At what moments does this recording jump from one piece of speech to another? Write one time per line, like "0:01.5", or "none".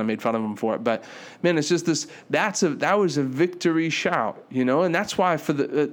none